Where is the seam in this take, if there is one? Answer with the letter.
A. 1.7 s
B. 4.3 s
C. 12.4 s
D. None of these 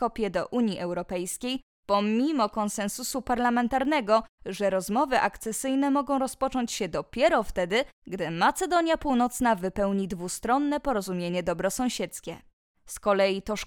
D